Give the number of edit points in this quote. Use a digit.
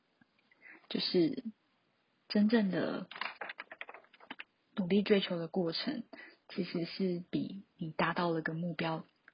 0